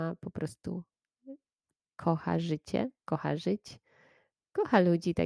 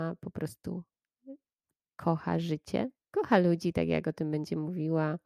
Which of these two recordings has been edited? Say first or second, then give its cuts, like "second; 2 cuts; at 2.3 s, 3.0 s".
second; 1 cut; at 3.0 s